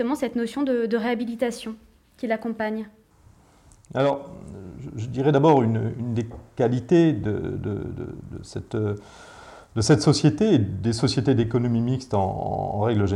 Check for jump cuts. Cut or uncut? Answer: uncut